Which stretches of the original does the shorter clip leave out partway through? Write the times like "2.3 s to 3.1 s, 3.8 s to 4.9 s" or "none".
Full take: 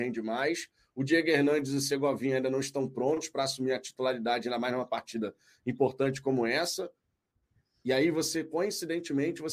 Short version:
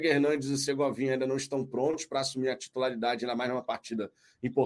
none